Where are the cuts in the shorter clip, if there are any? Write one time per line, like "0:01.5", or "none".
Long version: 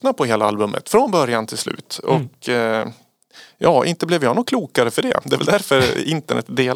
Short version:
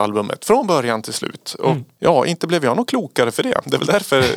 0:02.0